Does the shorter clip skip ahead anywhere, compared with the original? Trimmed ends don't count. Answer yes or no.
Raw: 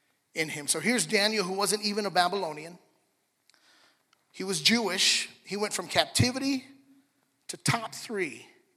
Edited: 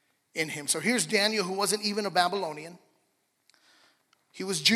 no